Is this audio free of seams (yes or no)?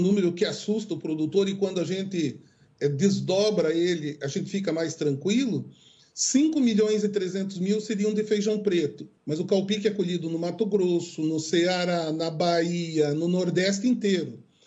no